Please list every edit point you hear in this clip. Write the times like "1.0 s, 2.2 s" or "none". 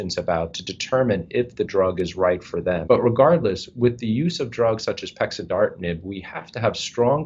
2.8 s

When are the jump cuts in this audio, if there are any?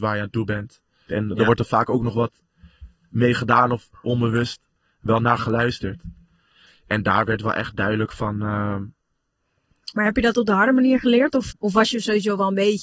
1.1 s, 11.5 s

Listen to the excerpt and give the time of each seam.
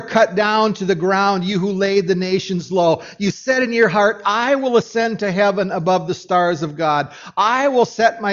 none

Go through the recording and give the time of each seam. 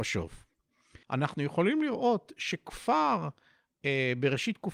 1.0 s

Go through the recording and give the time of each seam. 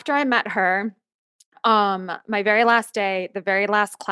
none

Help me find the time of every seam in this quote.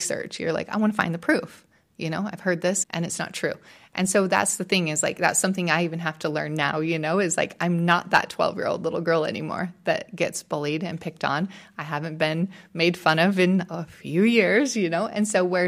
2.8 s

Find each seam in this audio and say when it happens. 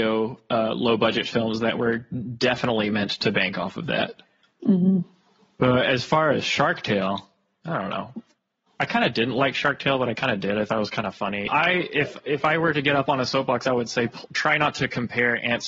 11.5 s

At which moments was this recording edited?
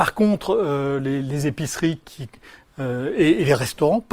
none

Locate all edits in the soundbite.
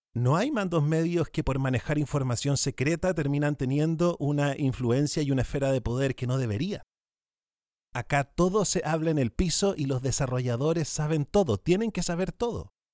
none

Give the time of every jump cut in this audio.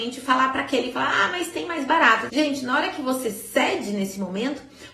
2.3 s

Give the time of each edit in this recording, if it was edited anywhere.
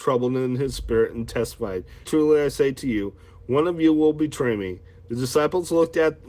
2.0 s

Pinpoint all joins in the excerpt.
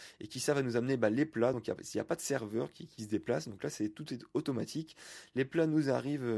none

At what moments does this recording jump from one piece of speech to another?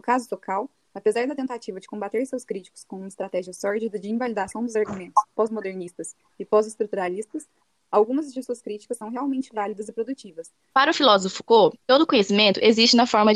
10.7 s

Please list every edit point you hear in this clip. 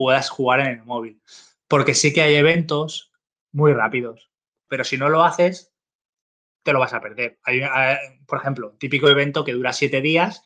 4.7 s

